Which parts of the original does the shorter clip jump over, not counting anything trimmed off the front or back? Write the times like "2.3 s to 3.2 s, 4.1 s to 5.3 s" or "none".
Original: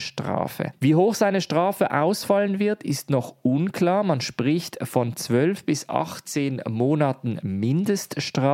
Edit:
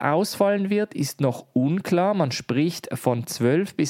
none

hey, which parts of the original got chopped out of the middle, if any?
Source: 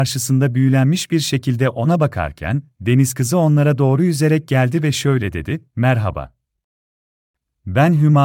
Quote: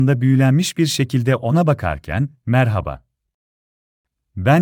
2.8 s to 5.7 s

